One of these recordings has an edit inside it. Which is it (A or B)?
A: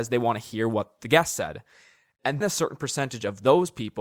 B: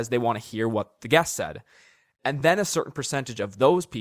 A